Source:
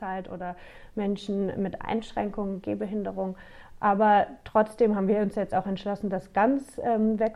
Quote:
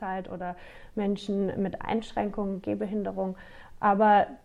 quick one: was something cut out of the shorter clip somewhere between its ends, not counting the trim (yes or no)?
no